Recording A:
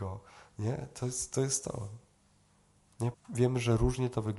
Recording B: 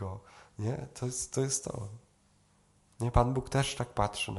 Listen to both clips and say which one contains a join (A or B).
A